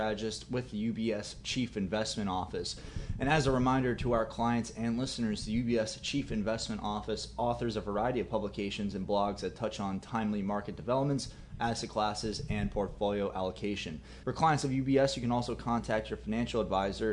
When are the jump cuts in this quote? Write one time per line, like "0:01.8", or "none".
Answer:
0:14.2